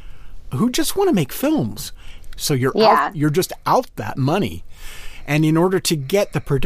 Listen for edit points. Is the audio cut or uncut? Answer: cut